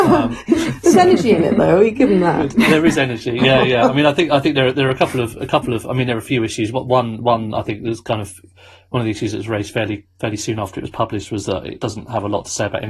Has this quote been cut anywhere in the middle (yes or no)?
no